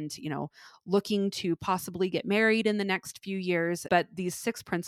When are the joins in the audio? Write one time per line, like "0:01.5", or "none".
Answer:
0:03.9

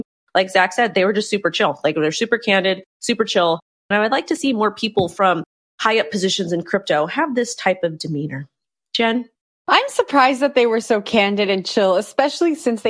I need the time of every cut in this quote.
none

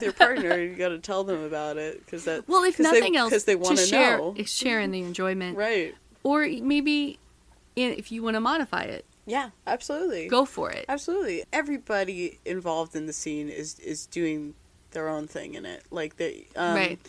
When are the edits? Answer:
0:07.9
0:11.4

